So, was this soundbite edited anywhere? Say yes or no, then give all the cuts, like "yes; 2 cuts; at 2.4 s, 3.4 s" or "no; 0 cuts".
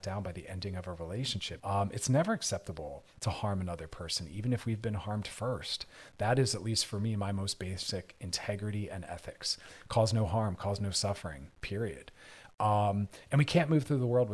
yes; 1 cut; at 1.6 s